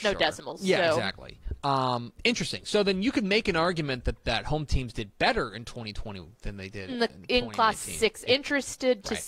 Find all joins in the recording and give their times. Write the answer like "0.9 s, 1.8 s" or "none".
2.2 s, 6.9 s, 8.3 s